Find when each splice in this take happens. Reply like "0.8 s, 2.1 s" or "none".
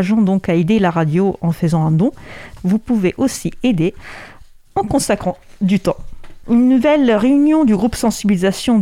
2.6 s, 6.4 s